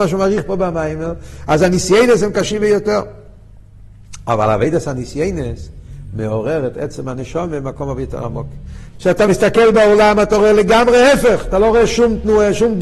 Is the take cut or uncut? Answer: cut